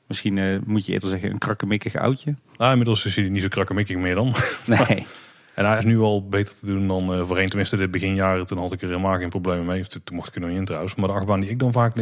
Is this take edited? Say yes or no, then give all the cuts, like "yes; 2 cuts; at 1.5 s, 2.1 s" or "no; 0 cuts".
yes; 2 cuts; at 5.8 s, 11.0 s